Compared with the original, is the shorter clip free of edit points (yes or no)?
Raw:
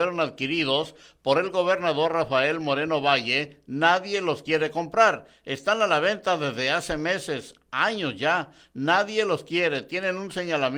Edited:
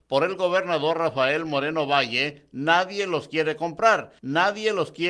no